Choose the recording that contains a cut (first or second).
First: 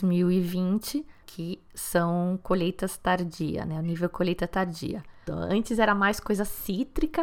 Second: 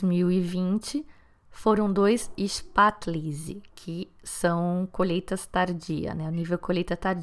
first